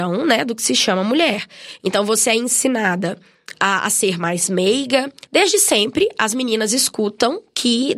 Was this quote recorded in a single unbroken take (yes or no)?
no